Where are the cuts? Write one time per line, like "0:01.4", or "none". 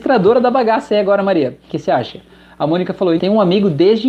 0:01.7
0:03.2